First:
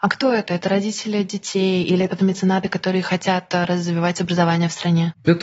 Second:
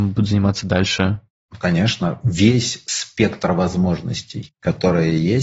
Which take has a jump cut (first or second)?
first